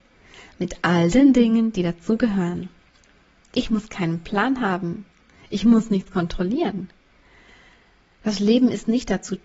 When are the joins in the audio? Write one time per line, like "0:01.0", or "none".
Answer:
none